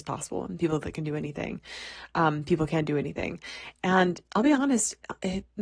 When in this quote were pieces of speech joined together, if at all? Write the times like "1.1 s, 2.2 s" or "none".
none